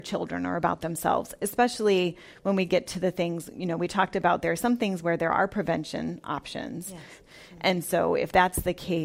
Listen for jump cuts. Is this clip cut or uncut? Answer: cut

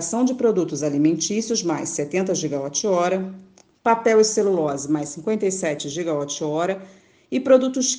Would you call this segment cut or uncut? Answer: uncut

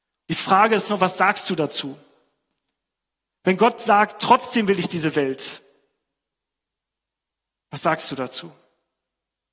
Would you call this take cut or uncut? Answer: uncut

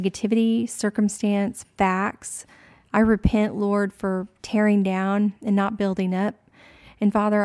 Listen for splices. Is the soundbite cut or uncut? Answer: uncut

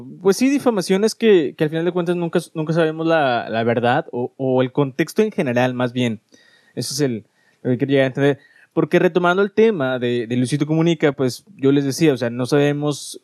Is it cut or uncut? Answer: uncut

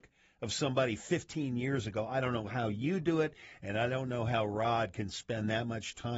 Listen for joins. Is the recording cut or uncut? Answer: uncut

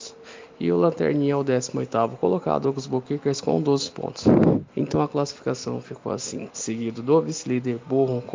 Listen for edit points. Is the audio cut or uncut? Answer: cut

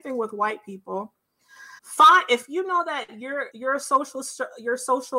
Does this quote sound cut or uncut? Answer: cut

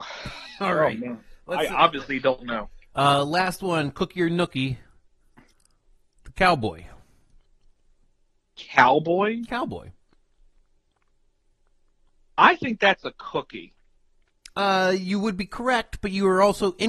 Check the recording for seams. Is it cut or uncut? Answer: cut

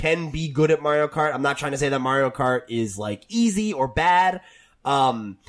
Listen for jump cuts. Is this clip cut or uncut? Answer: uncut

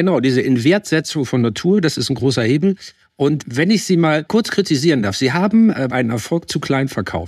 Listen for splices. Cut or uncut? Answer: cut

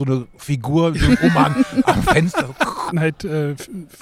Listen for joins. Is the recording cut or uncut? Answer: cut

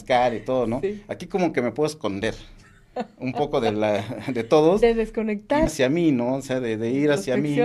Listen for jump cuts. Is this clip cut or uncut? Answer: cut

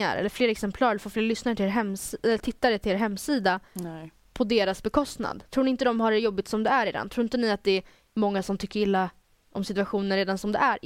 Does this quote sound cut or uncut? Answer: uncut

